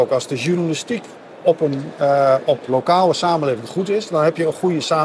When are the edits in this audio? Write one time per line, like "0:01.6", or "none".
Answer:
0:02.7